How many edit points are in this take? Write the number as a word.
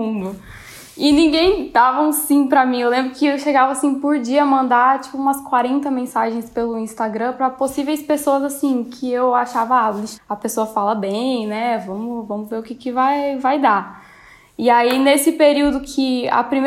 one